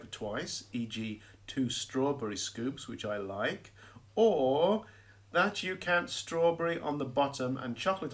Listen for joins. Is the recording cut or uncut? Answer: uncut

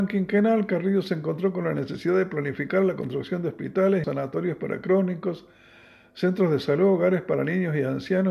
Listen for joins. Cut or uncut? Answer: cut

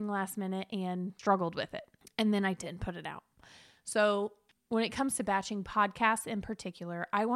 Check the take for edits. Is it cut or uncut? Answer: uncut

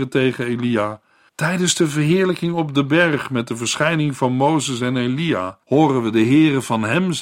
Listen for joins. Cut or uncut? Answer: cut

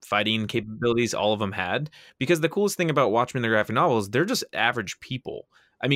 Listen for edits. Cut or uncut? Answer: uncut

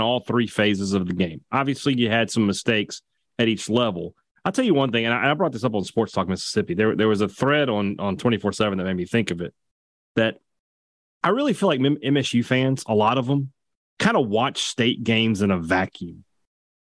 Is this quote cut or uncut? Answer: uncut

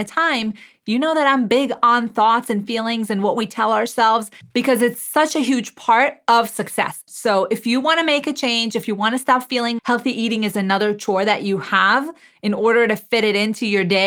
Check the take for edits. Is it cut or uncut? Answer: cut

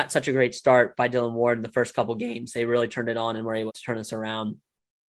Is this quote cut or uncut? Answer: cut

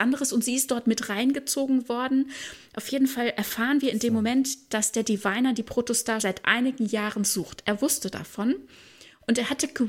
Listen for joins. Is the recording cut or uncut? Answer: cut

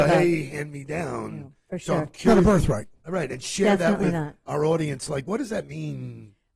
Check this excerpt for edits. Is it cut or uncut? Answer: uncut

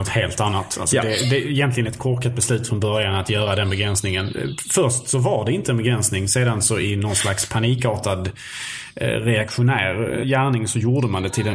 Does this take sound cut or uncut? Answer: cut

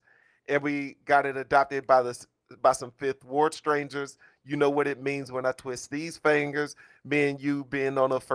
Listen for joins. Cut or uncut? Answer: uncut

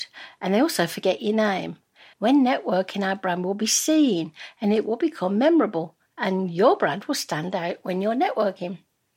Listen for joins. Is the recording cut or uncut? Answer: cut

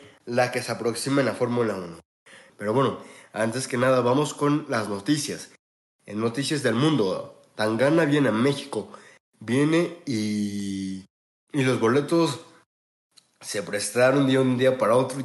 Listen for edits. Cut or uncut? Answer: cut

